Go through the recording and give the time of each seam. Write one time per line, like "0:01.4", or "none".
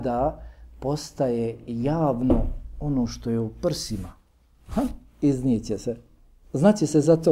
none